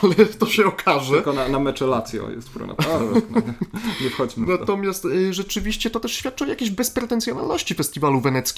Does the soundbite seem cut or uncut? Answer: uncut